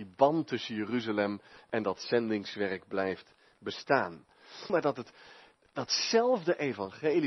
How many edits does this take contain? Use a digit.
1